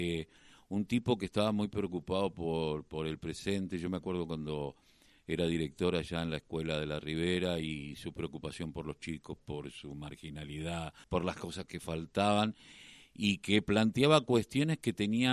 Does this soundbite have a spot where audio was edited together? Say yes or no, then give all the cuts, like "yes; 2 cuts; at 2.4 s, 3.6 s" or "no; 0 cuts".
yes; 2 cuts; at 9.4 s, 11.0 s